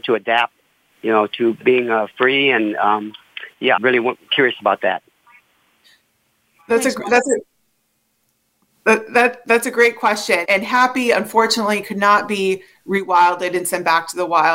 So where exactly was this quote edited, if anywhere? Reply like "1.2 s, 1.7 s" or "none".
3.8 s, 10.4 s